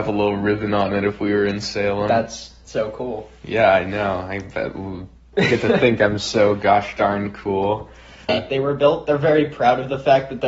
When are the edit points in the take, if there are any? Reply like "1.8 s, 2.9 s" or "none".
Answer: 8.3 s